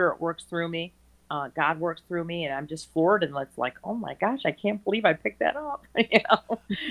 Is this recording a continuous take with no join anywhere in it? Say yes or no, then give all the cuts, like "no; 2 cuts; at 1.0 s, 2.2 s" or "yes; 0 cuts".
yes; 0 cuts